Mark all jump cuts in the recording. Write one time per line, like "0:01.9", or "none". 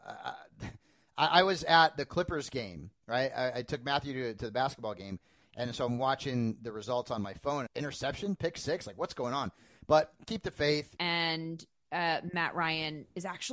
0:07.7
0:11.0